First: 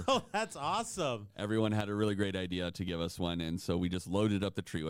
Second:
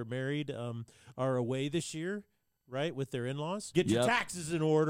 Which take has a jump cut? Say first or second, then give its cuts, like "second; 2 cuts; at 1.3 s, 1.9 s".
second; 1 cut; at 3.7 s